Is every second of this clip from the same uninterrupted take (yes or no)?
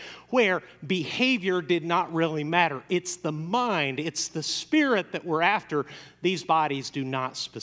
yes